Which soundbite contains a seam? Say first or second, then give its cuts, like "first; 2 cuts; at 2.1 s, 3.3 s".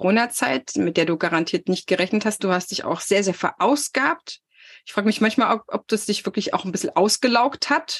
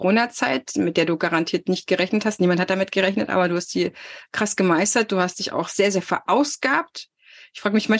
first; 1 cut; at 2.4 s